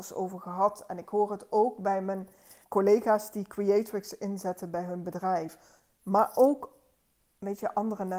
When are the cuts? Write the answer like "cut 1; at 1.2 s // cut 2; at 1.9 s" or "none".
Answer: cut 1; at 2.6 s